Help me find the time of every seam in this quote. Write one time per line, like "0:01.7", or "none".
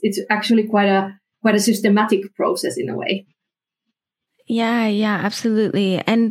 none